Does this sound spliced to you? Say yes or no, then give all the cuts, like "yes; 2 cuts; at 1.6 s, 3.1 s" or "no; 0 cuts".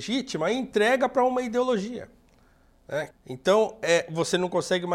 yes; 1 cut; at 3.1 s